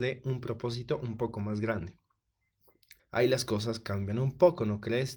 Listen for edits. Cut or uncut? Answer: cut